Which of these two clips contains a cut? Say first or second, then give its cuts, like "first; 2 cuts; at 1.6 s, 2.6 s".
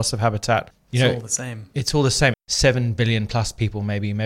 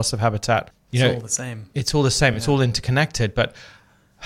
first; 1 cut; at 2.3 s